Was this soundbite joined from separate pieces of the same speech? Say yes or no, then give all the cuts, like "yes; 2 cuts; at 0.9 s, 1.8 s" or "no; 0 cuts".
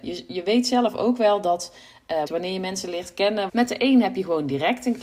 yes; 2 cuts; at 2.3 s, 3.5 s